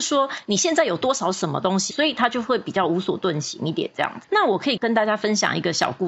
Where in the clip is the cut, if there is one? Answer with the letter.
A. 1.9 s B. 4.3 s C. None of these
A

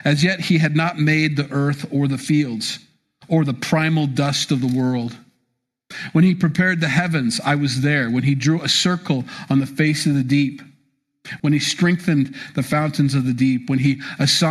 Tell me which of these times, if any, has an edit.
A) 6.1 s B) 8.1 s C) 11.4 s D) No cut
C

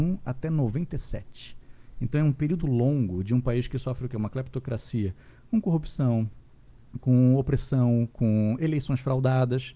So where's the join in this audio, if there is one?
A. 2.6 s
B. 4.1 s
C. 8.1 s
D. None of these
A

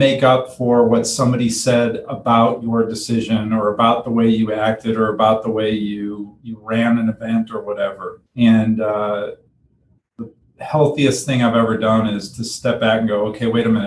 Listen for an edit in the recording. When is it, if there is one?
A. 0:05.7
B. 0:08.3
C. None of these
B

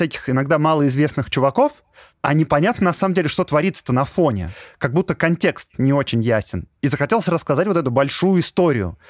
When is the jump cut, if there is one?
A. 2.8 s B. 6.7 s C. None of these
C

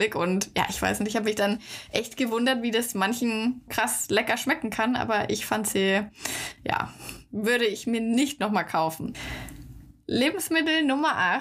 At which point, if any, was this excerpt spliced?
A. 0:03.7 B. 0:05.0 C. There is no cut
A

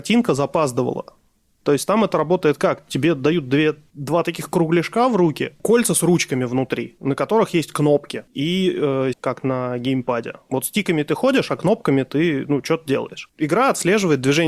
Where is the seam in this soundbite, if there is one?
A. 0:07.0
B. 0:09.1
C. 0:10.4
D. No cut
B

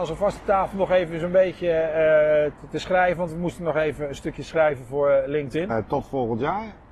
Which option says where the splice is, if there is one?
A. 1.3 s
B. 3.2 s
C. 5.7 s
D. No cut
C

